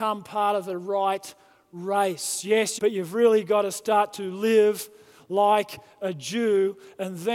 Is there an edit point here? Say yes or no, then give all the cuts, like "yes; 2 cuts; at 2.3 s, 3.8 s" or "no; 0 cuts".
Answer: yes; 1 cut; at 2.8 s